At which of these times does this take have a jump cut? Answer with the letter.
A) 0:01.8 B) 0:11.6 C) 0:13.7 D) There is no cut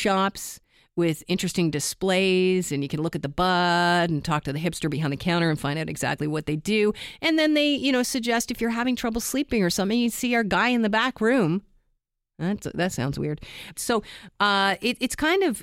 C